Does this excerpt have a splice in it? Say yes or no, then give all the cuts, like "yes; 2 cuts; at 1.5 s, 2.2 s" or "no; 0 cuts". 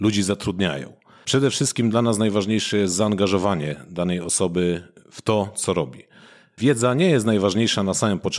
no; 0 cuts